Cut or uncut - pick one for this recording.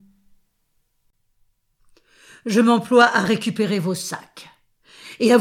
uncut